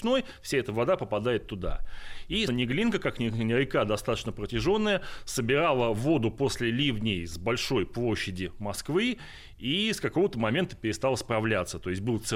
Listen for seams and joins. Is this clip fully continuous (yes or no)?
no